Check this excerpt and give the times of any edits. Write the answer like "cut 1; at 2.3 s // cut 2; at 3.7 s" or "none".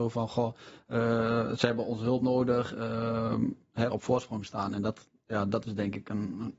cut 1; at 3.9 s

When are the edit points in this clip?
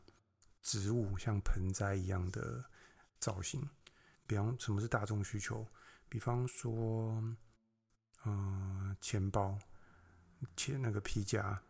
cut 1; at 4.1 s

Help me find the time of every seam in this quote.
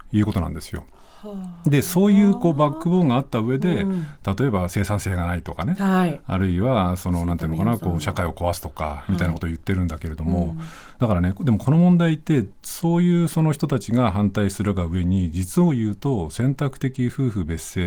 none

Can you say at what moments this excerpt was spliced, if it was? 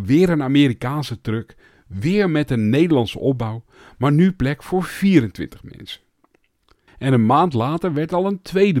cut 1; at 6.9 s

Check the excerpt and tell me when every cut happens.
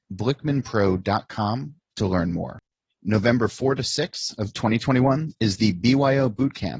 cut 1; at 2.9 s

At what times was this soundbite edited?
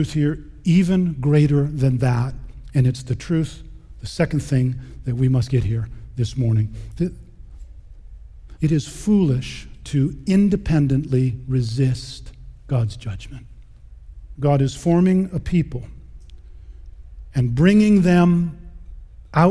cut 1; at 8.6 s // cut 2; at 14.3 s

